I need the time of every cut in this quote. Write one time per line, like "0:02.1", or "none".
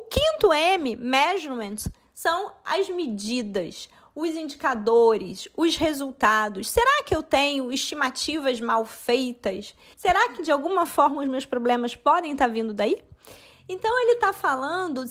0:09.9
0:13.5